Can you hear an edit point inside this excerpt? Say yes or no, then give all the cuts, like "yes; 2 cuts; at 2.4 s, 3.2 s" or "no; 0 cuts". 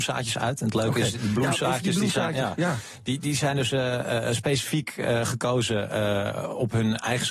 no; 0 cuts